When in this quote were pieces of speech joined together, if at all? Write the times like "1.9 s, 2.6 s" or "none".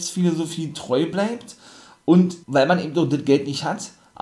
2.4 s